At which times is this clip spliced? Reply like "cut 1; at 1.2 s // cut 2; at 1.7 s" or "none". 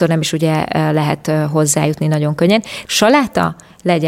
cut 1; at 2.9 s